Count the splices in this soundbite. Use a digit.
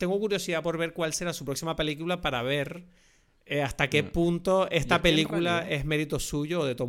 0